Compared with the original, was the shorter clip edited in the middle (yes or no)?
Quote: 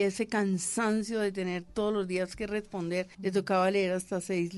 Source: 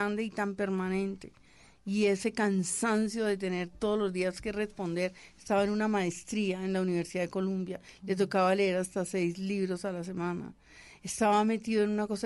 yes